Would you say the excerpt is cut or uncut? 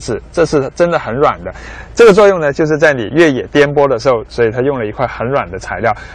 cut